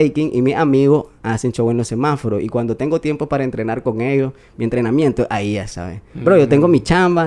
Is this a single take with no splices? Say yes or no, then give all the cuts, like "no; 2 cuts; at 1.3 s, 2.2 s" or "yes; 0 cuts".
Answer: yes; 0 cuts